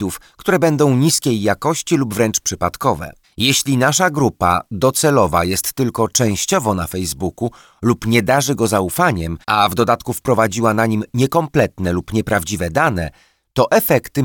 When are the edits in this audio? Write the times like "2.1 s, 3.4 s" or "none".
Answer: 3.2 s, 9.4 s